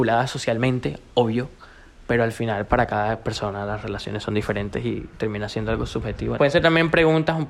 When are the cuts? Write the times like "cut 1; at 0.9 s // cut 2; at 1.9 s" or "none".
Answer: cut 1; at 6.4 s